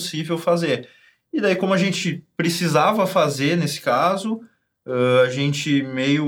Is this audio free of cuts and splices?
yes; 0 cuts

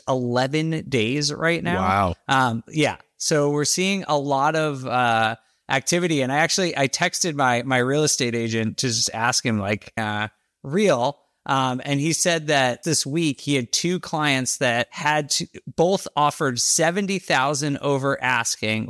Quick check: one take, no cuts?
no; 2 cuts; at 10.0 s, 12.8 s

